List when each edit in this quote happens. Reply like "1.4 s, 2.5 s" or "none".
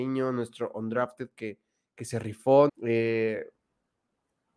2.7 s